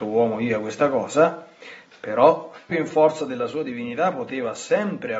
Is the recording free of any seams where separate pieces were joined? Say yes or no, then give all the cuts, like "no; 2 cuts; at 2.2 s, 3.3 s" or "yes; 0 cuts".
no; 1 cut; at 2.7 s